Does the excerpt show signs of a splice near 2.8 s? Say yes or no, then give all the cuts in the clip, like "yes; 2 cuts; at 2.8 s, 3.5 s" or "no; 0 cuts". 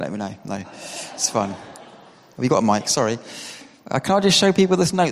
no; 0 cuts